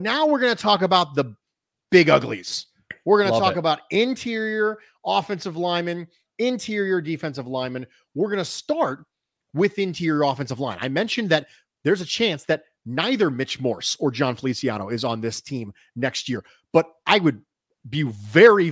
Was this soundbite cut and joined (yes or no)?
no